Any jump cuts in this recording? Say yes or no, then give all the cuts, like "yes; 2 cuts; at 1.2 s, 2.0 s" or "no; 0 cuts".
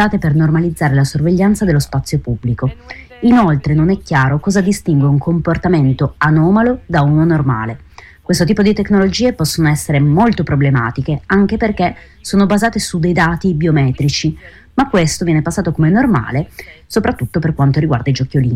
no; 0 cuts